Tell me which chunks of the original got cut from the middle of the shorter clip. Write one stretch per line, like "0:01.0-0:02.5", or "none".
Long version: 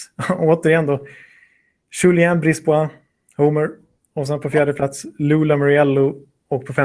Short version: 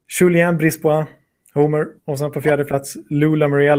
0:03.8-0:04.1